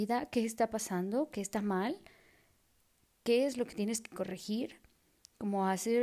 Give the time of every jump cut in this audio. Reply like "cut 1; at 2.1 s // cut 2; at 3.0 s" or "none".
none